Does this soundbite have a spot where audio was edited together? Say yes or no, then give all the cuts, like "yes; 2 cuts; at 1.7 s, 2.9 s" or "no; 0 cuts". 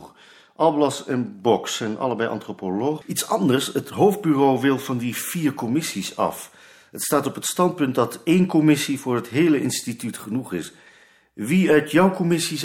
yes; 1 cut; at 3.0 s